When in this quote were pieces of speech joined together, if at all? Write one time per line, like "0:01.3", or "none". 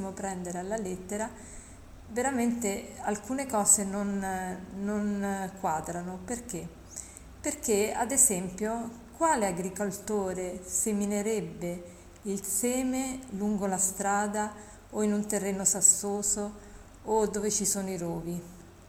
none